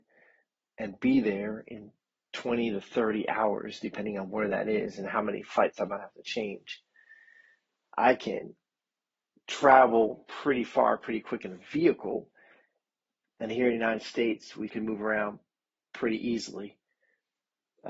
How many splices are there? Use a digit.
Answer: 1